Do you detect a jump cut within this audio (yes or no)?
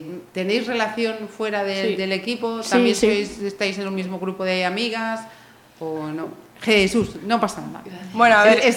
no